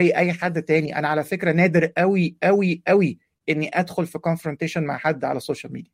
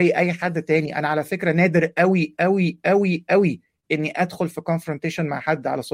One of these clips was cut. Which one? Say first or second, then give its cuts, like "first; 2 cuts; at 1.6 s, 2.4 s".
first; 1 cut; at 1.9 s